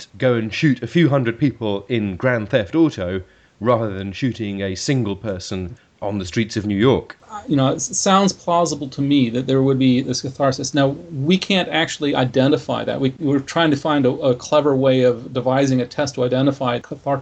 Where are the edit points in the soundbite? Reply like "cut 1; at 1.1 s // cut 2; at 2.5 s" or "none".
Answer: none